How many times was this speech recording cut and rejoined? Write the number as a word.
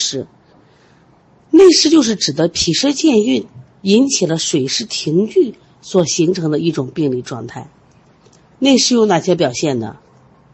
one